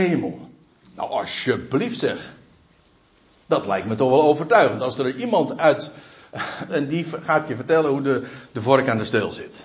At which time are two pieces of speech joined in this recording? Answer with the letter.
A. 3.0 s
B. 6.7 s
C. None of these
B